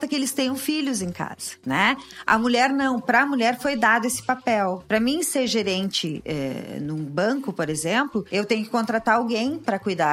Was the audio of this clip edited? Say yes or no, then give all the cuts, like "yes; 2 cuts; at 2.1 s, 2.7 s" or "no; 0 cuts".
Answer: no; 0 cuts